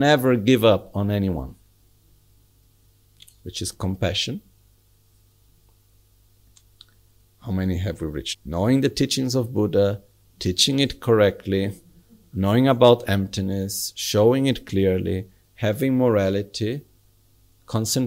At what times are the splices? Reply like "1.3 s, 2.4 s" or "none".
8.3 s